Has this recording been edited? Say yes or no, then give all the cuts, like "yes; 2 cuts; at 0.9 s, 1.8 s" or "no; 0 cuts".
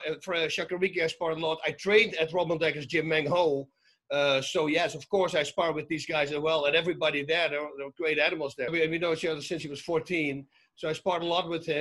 yes; 1 cut; at 8.7 s